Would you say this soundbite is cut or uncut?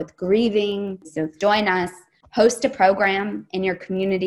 cut